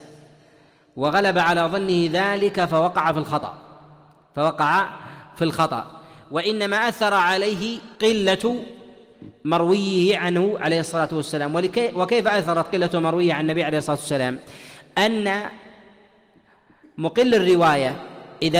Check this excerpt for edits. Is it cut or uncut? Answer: cut